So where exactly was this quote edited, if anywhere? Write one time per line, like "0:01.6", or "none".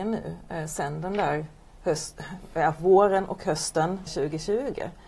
0:04.1